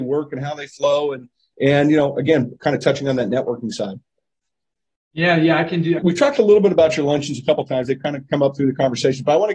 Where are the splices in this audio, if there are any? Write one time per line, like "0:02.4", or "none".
0:06.0